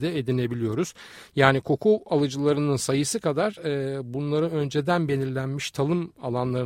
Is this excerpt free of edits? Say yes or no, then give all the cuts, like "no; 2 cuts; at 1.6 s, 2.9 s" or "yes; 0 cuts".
yes; 0 cuts